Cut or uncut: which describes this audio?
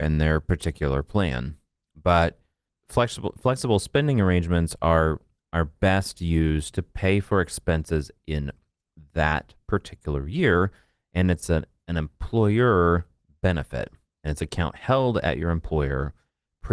uncut